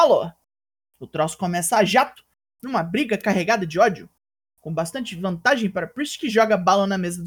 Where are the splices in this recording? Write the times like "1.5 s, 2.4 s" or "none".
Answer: none